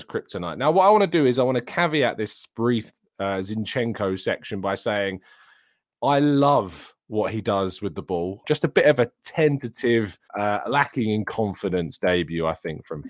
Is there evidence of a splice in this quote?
yes; 2 cuts; at 8.4 s, 10.3 s

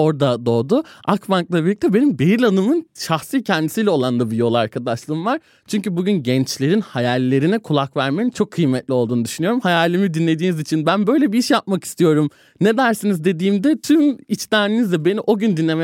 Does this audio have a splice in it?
no; 0 cuts

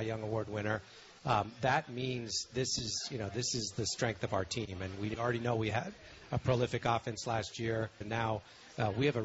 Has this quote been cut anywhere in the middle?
yes; 1 cut; at 8.0 s

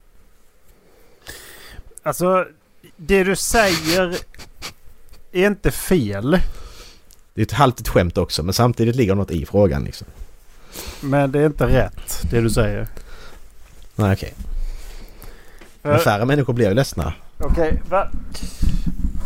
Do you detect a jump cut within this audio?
no; 0 cuts

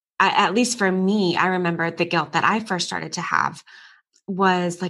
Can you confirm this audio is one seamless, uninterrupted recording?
yes; 0 cuts

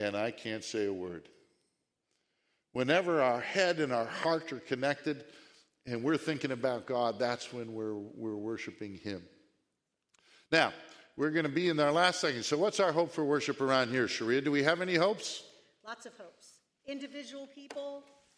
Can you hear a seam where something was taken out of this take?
no; 0 cuts

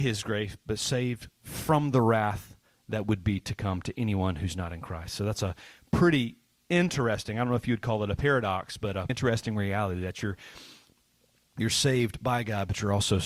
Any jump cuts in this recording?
yes; 1 cut; at 9.1 s

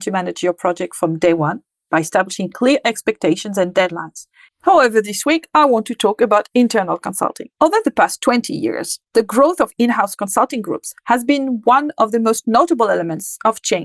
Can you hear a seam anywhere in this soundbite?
yes; 1 cut; at 4.5 s

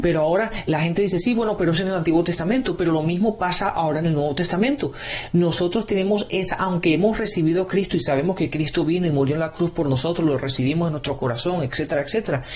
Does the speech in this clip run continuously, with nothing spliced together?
yes; 0 cuts

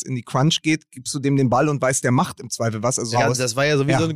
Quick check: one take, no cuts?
no; 1 cut; at 3.1 s

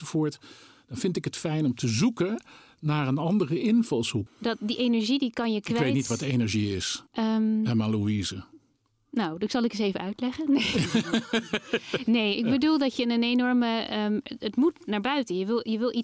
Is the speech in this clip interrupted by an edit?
yes; 2 cuts; at 4.3 s, 7.1 s

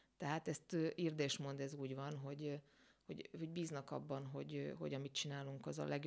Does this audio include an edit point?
no; 0 cuts

